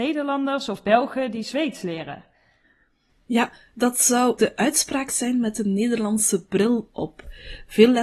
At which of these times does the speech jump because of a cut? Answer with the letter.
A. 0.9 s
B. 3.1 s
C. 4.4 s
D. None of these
C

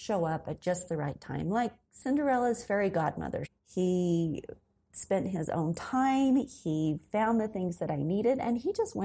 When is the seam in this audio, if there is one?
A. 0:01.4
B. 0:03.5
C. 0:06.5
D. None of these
B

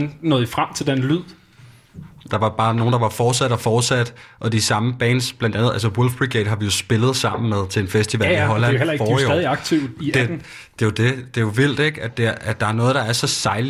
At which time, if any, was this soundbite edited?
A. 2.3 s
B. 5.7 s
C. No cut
A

